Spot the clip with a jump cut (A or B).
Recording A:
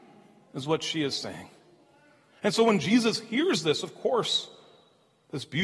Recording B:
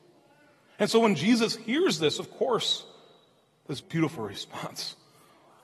B